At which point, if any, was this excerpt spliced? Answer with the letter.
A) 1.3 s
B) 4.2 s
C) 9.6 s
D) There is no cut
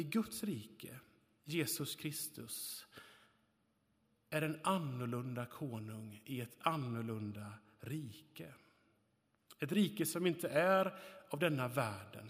D